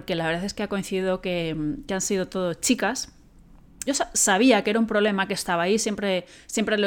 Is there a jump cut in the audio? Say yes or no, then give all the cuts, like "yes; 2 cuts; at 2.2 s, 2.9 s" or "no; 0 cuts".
yes; 1 cut; at 3.9 s